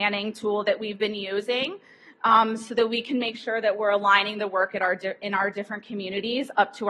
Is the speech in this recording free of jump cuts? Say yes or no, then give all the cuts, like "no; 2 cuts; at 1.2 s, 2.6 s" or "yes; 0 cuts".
yes; 0 cuts